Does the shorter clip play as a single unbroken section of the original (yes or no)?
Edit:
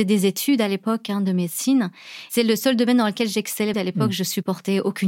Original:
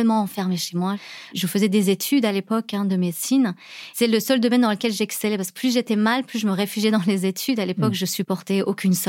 no